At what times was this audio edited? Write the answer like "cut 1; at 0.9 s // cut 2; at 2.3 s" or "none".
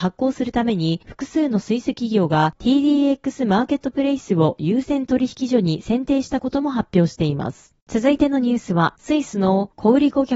cut 1; at 7.8 s // cut 2; at 8.9 s